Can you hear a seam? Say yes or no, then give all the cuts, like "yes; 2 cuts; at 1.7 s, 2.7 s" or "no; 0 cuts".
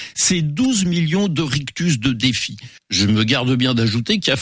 yes; 1 cut; at 2.8 s